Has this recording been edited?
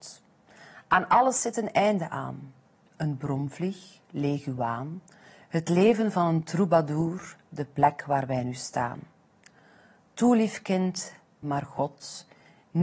yes; 1 cut; at 11.4 s

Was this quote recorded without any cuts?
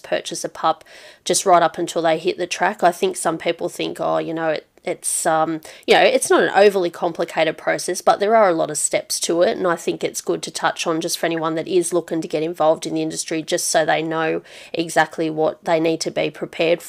yes; 0 cuts

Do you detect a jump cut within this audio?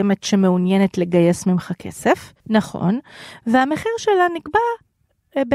yes; 1 cut; at 2.4 s

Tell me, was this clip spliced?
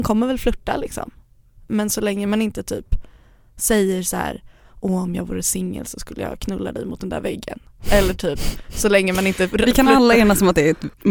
no; 0 cuts

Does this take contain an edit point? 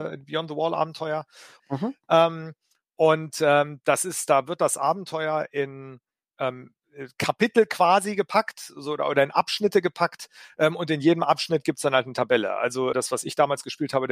yes; 2 cuts; at 1.6 s, 12.9 s

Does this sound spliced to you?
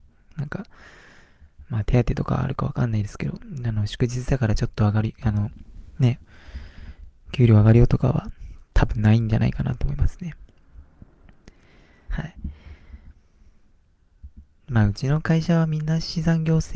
yes; 1 cut; at 12.1 s

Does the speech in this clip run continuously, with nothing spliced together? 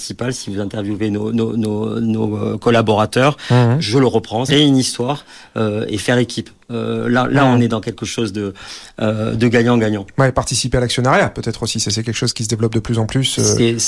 no; 1 cut; at 4.5 s

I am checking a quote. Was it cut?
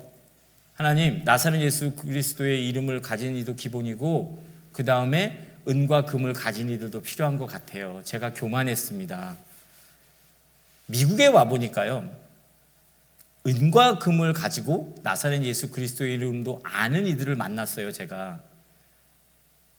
no; 0 cuts

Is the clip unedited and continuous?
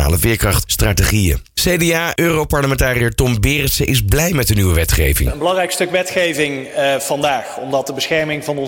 yes; 0 cuts

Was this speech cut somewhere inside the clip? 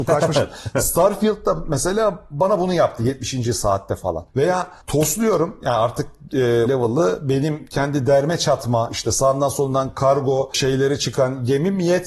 yes; 1 cut; at 6.7 s

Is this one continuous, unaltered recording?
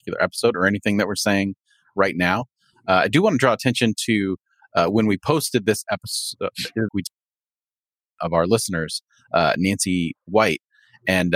no; 1 cut; at 6.9 s

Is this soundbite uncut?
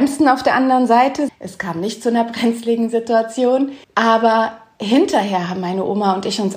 no; 2 cuts; at 1.3 s, 3.8 s

